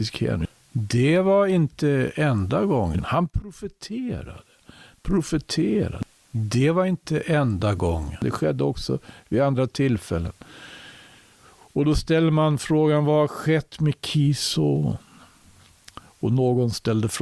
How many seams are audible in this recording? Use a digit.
0